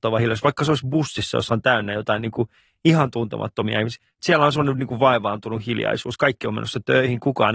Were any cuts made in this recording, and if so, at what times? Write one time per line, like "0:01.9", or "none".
0:04.2